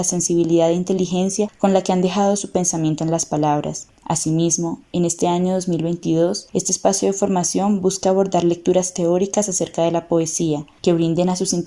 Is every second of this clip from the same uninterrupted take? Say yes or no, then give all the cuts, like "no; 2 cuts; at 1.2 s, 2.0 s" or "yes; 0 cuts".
yes; 0 cuts